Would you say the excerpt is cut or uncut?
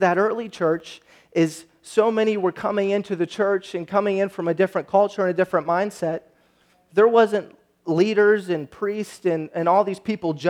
uncut